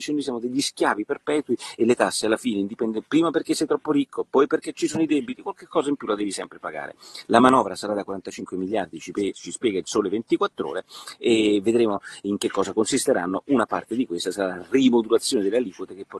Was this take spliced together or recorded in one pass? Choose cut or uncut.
uncut